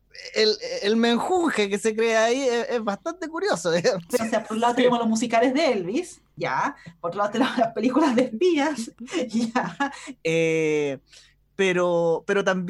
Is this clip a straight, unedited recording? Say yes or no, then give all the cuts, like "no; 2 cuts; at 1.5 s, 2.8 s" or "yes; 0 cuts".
no; 2 cuts; at 4.2 s, 10.2 s